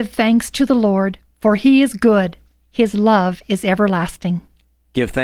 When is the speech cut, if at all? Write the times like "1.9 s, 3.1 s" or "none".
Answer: none